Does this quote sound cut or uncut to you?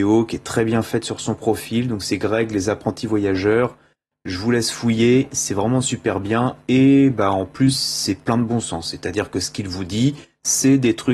uncut